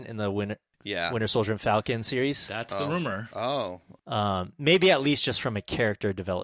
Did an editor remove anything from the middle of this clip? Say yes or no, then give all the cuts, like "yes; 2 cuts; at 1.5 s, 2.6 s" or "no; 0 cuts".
yes; 1 cut; at 4.0 s